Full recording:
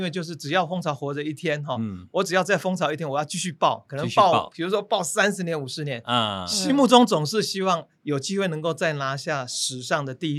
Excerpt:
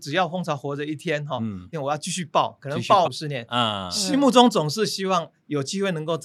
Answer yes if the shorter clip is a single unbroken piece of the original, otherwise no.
no